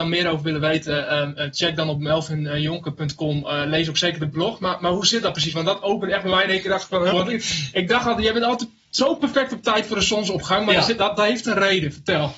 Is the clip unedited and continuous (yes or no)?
no